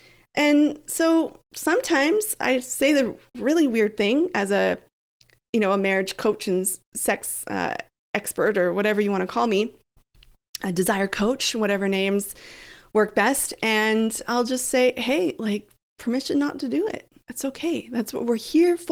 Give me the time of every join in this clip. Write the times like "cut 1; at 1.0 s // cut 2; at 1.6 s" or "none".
none

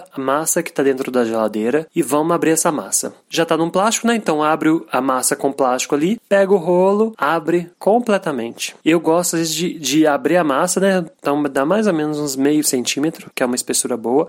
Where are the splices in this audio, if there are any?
cut 1; at 11.1 s

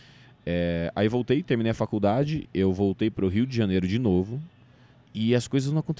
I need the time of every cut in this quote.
cut 1; at 2.4 s // cut 2; at 4.9 s

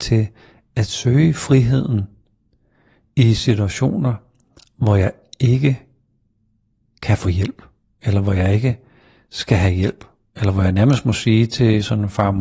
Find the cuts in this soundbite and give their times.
none

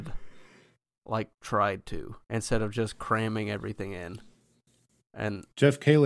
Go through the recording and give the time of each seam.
cut 1; at 2.2 s

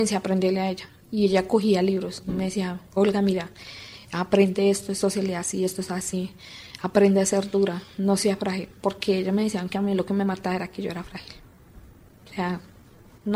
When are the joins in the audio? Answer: none

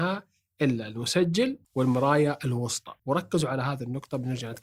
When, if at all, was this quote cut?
cut 1; at 1.6 s // cut 2; at 3.0 s

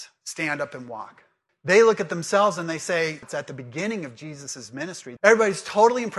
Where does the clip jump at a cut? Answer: cut 1; at 1.5 s // cut 2; at 3.2 s // cut 3; at 5.2 s

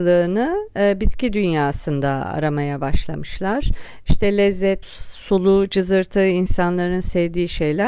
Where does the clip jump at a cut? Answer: cut 1; at 4.8 s

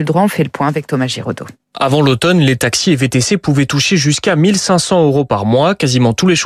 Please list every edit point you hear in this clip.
none

